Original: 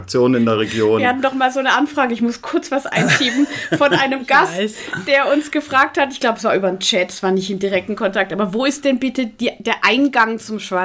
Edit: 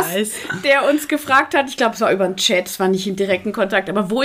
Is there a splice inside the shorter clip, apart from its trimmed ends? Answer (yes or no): no